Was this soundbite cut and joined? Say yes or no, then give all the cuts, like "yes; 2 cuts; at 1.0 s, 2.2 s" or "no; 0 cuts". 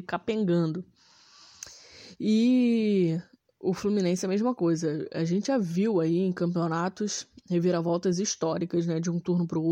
no; 0 cuts